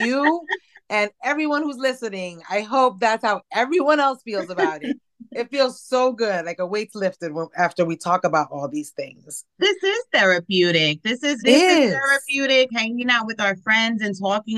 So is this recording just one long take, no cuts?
no; 2 cuts; at 11.4 s, 12.7 s

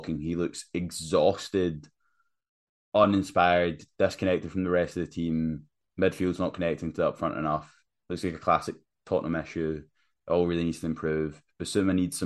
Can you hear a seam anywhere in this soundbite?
no; 0 cuts

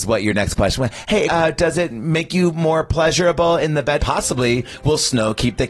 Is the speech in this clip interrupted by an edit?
yes; 2 cuts; at 1.3 s, 4.0 s

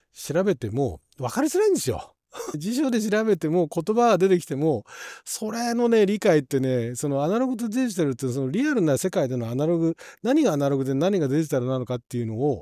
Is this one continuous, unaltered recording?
no; 1 cut; at 2.5 s

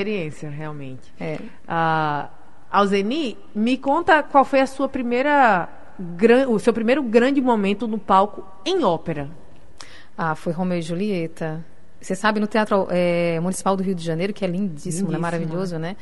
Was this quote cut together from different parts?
no; 0 cuts

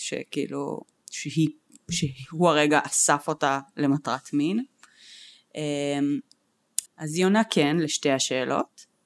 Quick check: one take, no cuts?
no; 1 cut; at 6.9 s

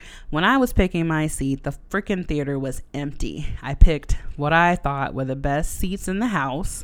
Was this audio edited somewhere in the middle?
no; 0 cuts

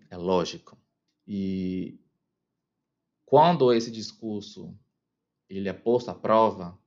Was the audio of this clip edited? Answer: yes; 1 cut; at 1.1 s

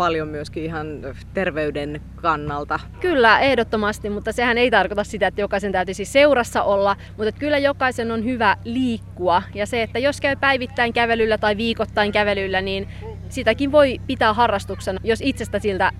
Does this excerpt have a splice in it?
yes; 2 cuts; at 2.9 s, 15.0 s

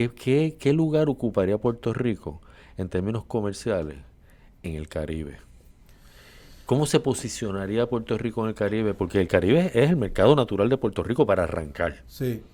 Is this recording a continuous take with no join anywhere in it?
yes; 0 cuts

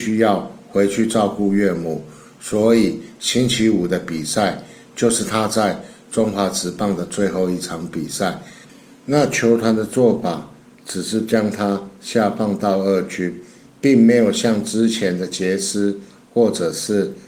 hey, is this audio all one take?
yes; 0 cuts

